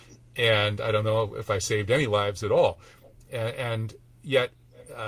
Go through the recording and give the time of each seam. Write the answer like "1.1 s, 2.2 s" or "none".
3.3 s